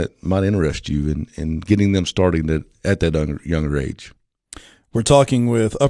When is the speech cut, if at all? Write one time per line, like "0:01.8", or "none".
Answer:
none